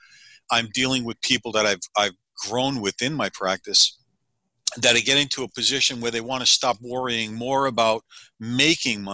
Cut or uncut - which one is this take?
uncut